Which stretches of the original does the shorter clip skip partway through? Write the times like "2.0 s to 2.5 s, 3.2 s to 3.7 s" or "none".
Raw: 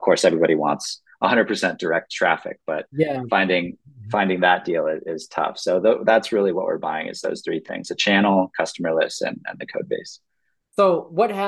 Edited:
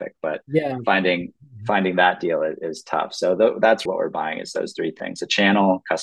6.3 s to 6.5 s